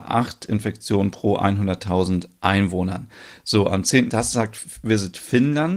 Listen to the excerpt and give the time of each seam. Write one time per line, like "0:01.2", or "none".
0:04.1